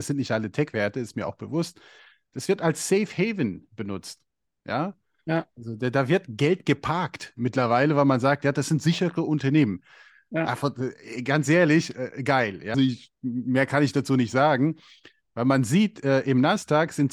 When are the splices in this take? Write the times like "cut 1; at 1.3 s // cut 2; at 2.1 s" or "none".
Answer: cut 1; at 12.7 s